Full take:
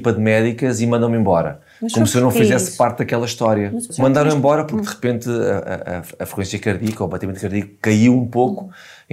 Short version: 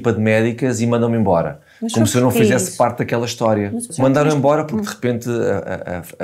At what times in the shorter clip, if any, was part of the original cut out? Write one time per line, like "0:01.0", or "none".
none